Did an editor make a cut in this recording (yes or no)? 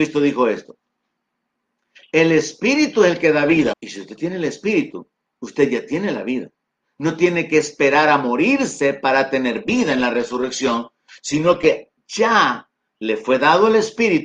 yes